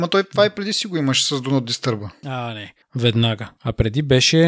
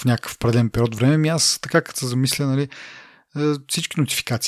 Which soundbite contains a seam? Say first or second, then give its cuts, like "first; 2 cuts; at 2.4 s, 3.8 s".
first; 1 cut; at 2.8 s